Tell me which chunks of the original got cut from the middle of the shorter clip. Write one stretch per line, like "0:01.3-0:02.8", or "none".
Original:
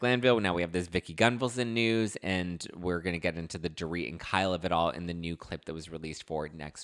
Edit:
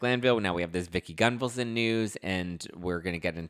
none

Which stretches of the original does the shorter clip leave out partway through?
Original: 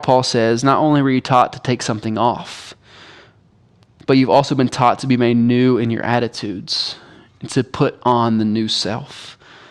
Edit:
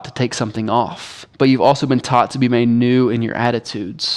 0:02.8-0:04.0

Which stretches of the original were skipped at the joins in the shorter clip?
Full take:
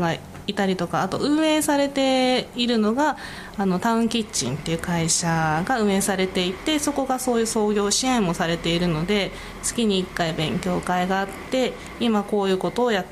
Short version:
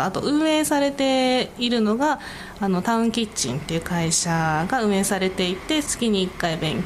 0:06.8-0:09.6

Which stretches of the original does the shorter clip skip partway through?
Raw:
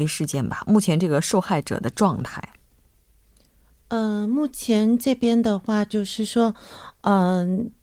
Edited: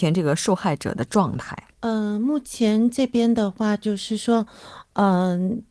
0:02.6-0:03.8

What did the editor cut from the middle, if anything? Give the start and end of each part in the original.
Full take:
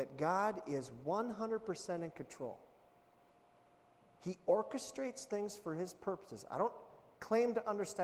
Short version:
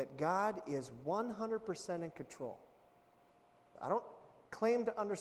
0:03.8-0:06.4

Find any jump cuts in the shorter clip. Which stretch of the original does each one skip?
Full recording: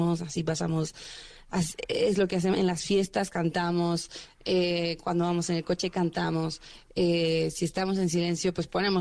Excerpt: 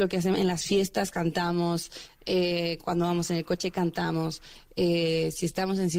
none

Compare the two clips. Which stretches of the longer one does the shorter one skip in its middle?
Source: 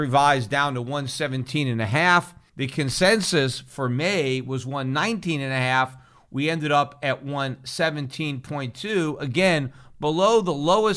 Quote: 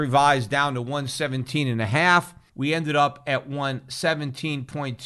0:02.5-0:06.3

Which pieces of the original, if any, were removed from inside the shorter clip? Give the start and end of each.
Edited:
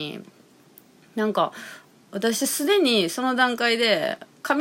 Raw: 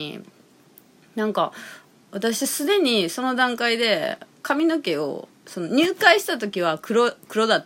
none

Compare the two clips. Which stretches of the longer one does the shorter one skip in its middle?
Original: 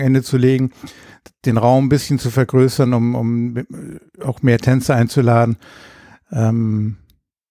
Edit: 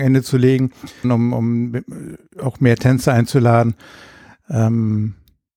0:01.0-0:02.9

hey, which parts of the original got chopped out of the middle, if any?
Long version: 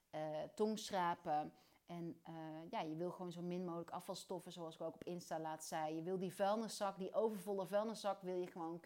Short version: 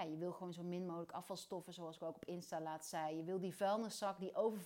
none

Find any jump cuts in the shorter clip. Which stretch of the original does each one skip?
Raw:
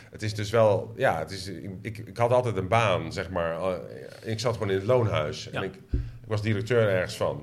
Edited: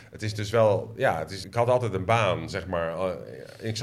0:01.4-0:02.1

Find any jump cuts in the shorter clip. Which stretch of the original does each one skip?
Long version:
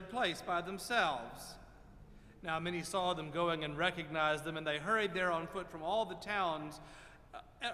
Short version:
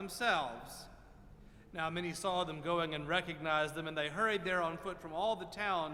none

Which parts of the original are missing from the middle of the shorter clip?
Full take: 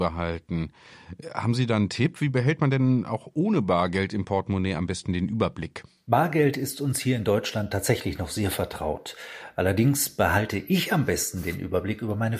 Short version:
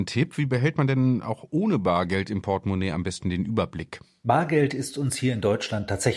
none

